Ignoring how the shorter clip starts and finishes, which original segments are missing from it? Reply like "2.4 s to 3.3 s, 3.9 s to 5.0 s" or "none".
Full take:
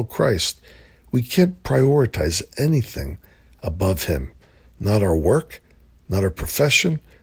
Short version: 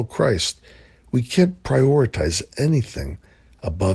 none

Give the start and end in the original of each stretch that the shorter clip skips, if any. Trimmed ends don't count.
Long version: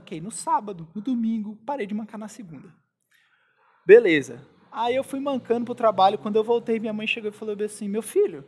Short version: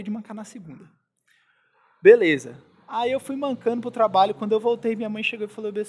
none

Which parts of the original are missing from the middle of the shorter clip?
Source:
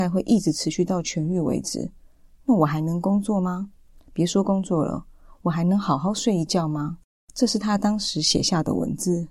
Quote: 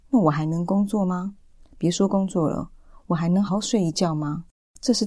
5.8 s to 6.0 s

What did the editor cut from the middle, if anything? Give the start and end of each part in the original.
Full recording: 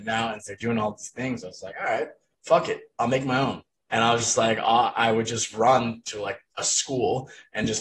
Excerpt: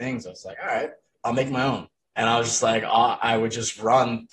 2.3 s to 2.9 s

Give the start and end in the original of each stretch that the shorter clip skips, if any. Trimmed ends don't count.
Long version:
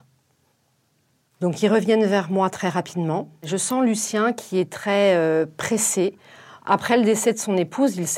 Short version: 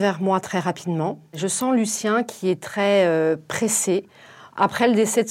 none

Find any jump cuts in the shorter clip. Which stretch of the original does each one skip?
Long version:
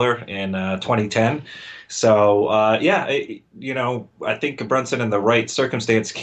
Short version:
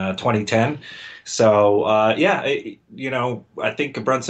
none

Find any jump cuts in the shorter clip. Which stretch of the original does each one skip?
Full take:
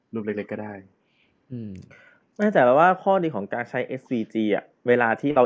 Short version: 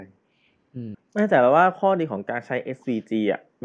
1.7 s to 2.2 s

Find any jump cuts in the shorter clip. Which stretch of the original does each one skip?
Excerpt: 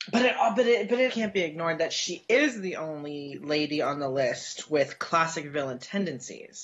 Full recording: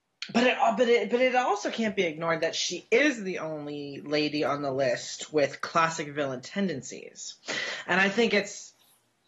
1.3 s to 1.7 s

